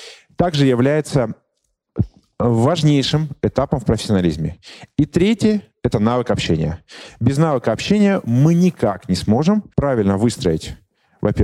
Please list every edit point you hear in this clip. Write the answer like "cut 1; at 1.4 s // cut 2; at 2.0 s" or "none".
cut 1; at 9.7 s